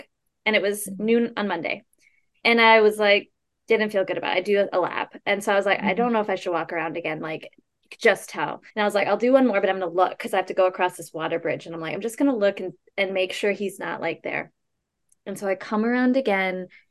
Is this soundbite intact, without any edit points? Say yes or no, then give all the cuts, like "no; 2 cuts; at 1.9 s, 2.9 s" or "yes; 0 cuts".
no; 1 cut; at 8.7 s